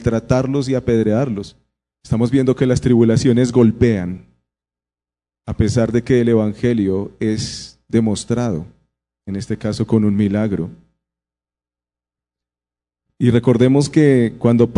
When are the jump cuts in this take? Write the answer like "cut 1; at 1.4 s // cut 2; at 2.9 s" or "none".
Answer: cut 1; at 1.9 s